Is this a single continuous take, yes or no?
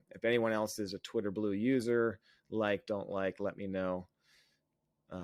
yes